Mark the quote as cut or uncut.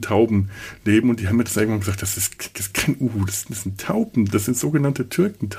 uncut